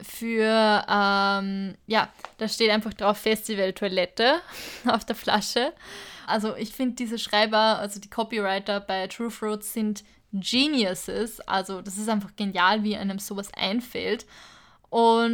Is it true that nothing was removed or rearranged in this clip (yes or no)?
no